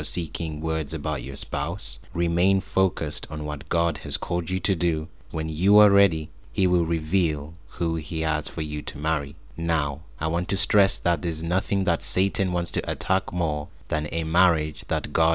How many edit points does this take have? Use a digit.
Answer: 1